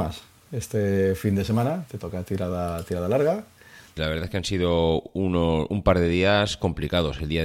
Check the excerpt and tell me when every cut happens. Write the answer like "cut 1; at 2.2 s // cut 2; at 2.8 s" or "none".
cut 1; at 4.0 s